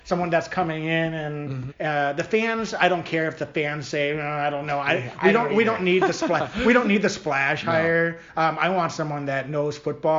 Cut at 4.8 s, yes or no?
no